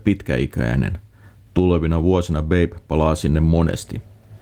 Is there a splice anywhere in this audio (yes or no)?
no